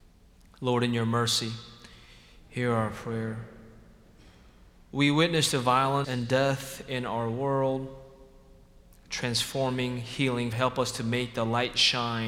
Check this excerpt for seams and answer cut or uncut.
cut